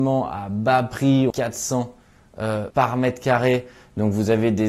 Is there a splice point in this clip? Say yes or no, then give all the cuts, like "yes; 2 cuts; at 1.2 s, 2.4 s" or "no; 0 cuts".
yes; 2 cuts; at 1.3 s, 2.7 s